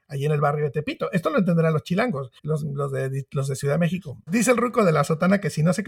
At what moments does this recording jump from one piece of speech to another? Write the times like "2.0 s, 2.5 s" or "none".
2.4 s, 4.3 s